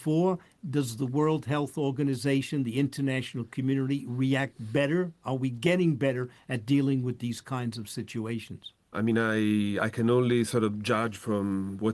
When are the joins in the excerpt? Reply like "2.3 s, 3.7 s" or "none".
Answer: 8.9 s